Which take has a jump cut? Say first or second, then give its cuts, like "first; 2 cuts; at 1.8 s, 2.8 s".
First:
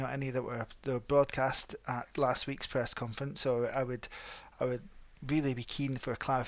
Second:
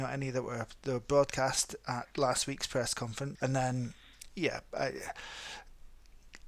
second; 1 cut; at 3.3 s